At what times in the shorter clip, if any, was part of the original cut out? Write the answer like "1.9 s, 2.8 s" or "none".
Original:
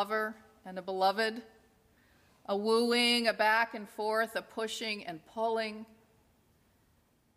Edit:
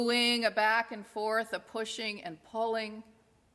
none

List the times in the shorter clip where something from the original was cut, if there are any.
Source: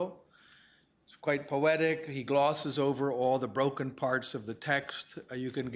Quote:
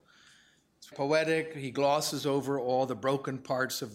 0.9 s

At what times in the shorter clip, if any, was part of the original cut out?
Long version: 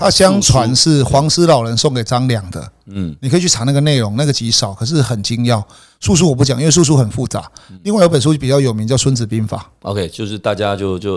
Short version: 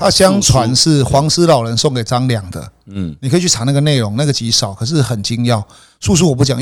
none

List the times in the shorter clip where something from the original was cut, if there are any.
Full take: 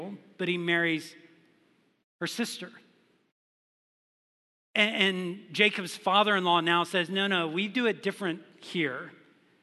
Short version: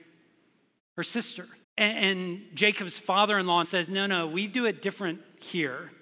1.6 s, 3.6 s

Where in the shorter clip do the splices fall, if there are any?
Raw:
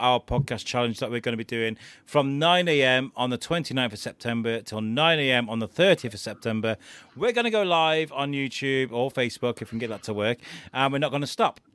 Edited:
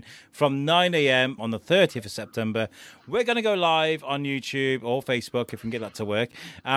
1.4 s

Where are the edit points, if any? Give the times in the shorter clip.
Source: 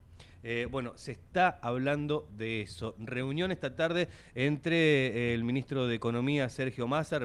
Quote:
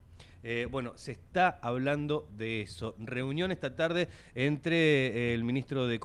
none

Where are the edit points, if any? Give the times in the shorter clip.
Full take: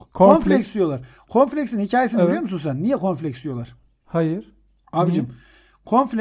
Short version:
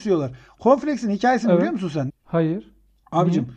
2.1 s

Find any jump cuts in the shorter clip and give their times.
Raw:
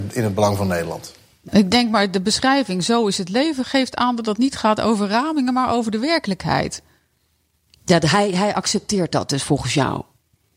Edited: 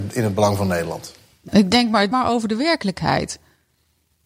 2.1 s

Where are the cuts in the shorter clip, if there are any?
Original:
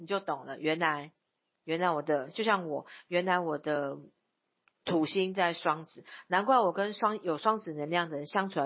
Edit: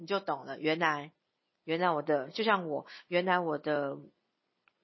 none

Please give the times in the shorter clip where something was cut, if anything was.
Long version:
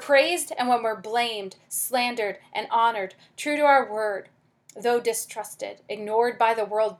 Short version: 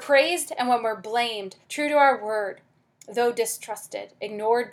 1.6 s

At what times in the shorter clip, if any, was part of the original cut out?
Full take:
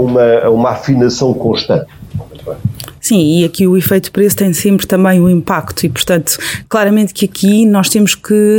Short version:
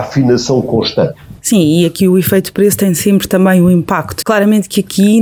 1.4 s, 4.2 s

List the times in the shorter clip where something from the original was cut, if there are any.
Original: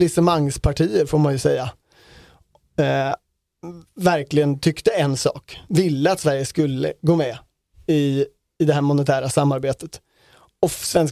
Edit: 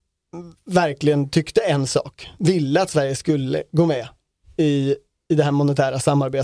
none

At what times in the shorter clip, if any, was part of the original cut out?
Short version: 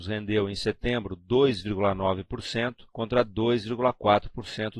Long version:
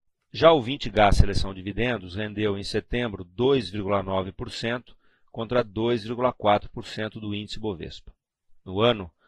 2.9 s

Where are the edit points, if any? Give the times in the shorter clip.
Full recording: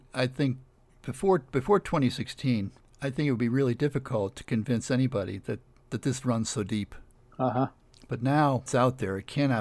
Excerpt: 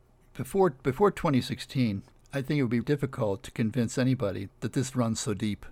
2.8 s, 4.5 s

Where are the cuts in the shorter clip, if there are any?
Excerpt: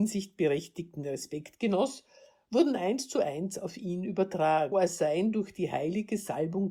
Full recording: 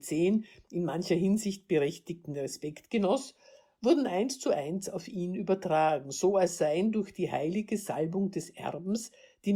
4.7 s

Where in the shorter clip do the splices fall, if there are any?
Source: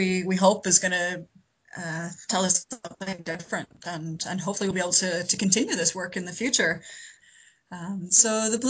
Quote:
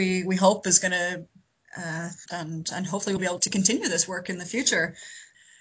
2.3 s, 3.4 s

